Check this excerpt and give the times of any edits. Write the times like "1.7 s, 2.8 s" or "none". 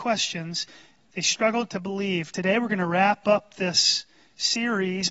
none